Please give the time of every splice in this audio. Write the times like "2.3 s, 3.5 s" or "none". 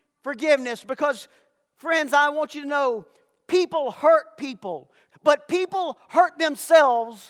5.1 s